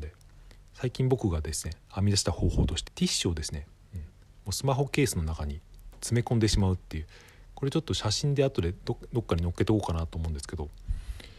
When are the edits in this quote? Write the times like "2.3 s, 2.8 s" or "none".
2.9 s